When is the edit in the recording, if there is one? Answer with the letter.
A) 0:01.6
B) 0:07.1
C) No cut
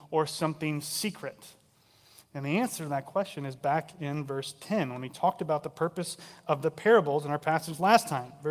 C